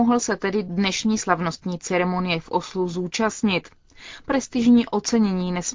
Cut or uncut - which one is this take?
uncut